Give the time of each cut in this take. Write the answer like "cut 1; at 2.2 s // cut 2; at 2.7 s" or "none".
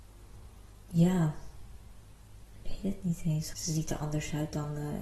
cut 1; at 3.5 s

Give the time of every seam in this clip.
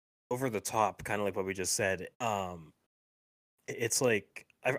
cut 1; at 2.1 s

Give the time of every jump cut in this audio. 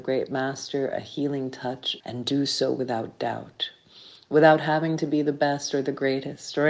cut 1; at 2.0 s

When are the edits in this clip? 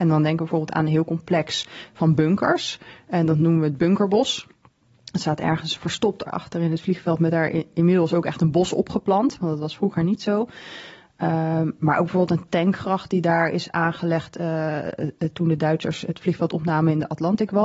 cut 1; at 6.3 s

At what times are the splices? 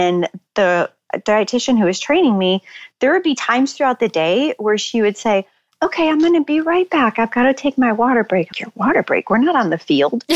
cut 1; at 8.5 s

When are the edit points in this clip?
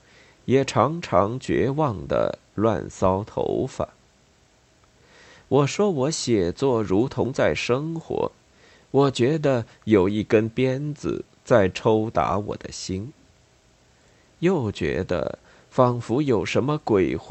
cut 1; at 8.8 s

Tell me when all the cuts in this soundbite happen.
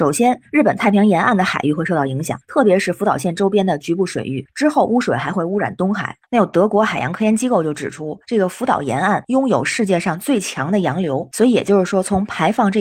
none

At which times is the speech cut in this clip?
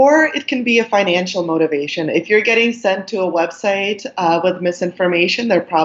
none

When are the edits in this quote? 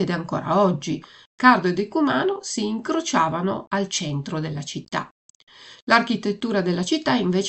cut 1; at 1.3 s

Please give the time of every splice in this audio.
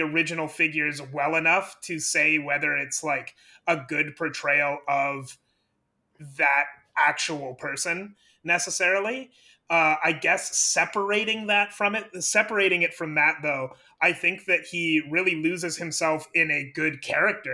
none

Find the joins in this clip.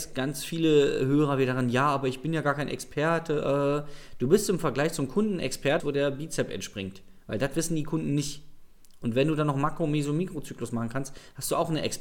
cut 1; at 5.8 s

